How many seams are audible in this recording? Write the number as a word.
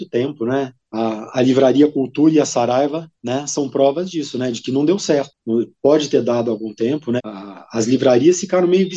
two